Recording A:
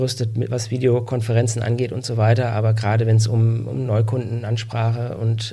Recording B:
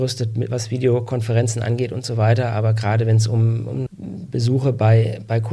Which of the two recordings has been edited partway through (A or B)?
B